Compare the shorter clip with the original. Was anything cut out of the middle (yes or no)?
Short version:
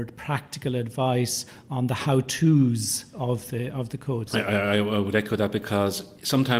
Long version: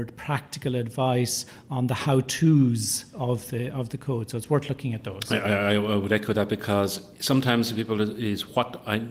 yes